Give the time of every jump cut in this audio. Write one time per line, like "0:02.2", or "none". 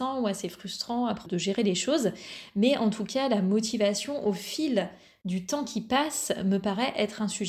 0:01.3